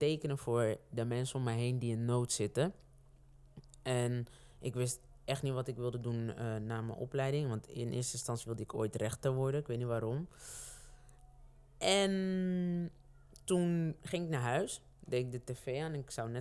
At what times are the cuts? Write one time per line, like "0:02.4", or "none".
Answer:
none